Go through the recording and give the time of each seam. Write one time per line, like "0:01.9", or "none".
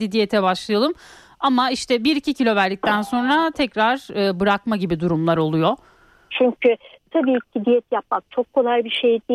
0:06.3